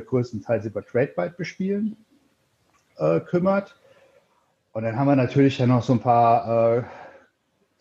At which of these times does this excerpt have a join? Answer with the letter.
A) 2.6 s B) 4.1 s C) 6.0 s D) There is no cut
C